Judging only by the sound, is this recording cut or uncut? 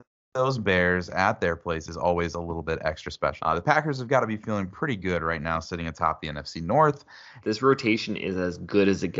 cut